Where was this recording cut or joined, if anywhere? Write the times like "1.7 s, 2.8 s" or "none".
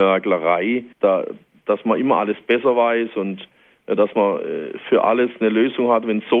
0.9 s

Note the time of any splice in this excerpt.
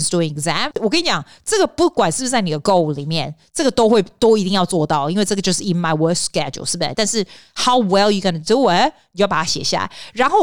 6.9 s

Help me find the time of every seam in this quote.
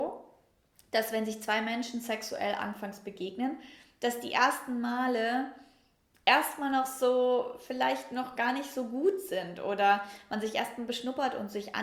none

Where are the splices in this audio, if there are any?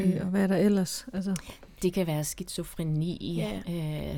none

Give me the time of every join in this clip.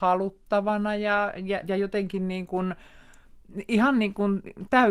1.6 s

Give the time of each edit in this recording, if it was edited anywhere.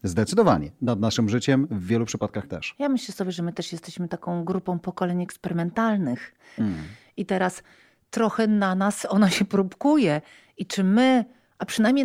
6.6 s

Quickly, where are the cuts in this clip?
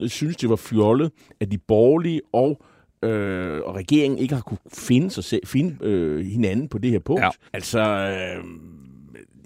7.5 s

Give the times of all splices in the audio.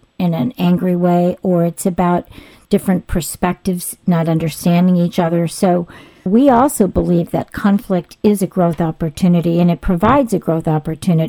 6.3 s

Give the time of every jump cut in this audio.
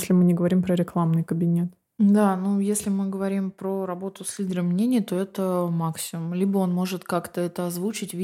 none

